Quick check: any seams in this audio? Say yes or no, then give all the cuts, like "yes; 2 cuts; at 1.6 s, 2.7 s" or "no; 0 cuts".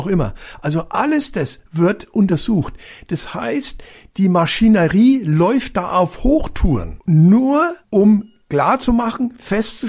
no; 0 cuts